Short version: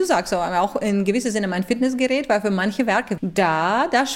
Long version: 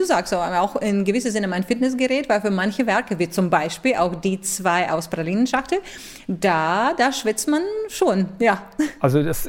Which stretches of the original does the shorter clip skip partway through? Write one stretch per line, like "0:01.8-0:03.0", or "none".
0:03.2-0:06.2